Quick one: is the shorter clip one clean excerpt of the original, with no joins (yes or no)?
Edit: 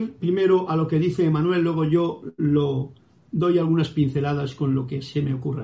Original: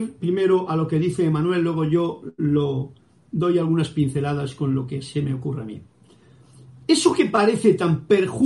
yes